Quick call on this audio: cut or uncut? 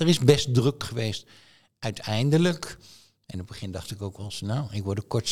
uncut